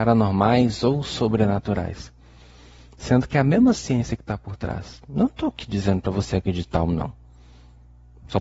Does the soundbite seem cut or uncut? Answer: uncut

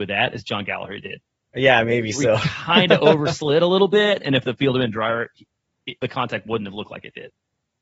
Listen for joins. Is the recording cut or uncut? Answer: cut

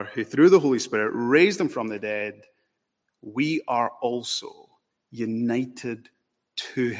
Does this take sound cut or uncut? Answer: uncut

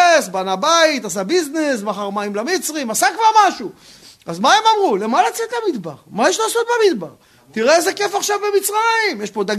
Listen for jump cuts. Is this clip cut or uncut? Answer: uncut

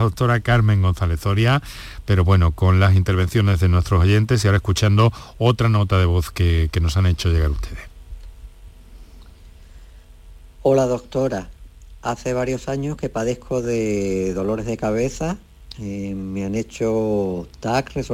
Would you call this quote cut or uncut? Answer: uncut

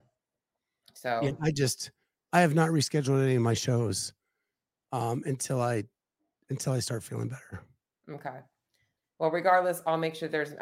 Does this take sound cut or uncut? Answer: uncut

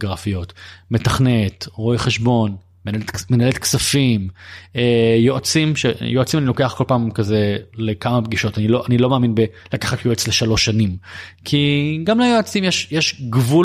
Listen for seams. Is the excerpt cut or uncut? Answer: uncut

